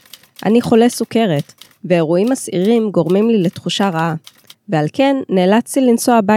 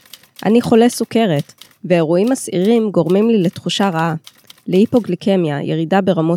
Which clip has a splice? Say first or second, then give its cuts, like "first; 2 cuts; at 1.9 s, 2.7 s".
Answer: first; 1 cut; at 4.5 s